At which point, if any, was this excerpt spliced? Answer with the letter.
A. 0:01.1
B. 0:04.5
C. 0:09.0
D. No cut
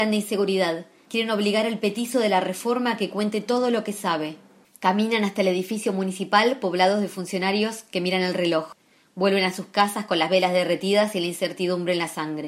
A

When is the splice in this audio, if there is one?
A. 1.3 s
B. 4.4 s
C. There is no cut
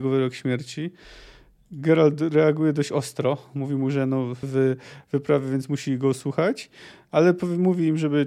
B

